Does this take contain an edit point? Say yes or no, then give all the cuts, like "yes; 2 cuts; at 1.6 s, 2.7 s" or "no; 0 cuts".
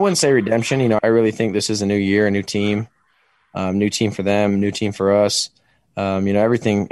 yes; 1 cut; at 1.0 s